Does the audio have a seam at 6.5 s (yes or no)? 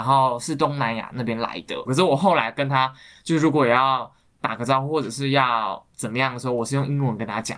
no